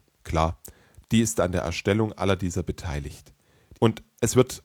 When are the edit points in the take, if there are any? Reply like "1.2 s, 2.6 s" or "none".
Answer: 1.0 s, 3.7 s